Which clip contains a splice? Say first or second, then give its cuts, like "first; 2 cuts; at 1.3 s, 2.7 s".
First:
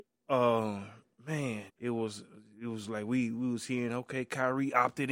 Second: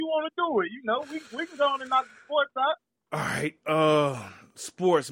first; 1 cut; at 1.7 s